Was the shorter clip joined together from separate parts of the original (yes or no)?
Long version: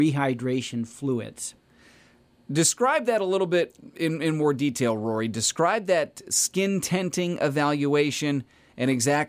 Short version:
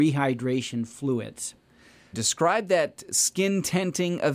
yes